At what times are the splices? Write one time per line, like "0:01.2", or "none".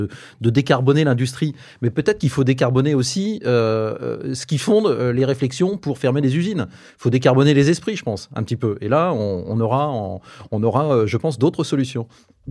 none

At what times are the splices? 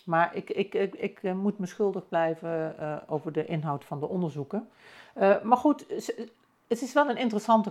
none

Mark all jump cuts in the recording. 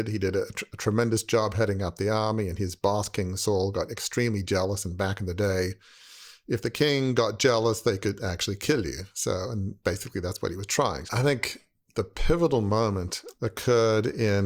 0:11.1

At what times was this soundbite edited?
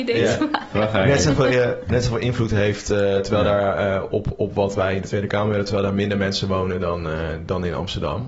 none

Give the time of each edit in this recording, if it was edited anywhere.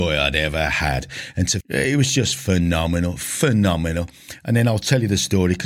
0:01.6

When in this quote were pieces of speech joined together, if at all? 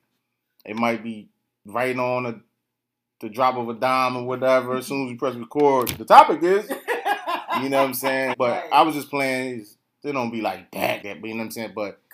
0:08.3
0:11.0

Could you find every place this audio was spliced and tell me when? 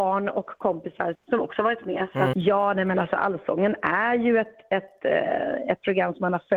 0:01.1
0:02.3

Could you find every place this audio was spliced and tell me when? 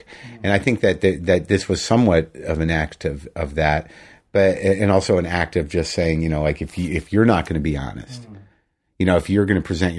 none

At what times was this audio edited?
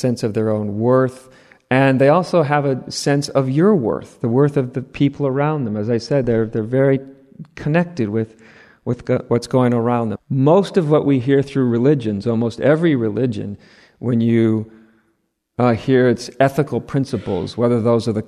0:10.2

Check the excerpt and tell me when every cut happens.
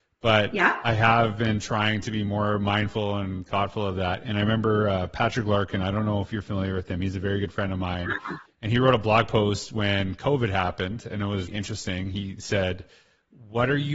0:11.5

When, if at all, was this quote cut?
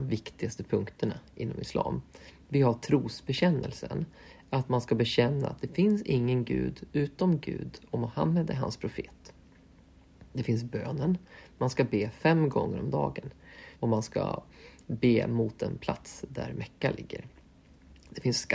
0:13.7

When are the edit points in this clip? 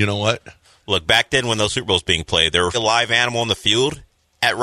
0:02.7

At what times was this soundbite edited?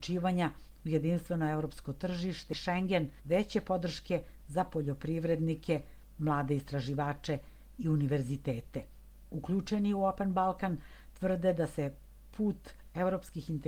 0:03.2

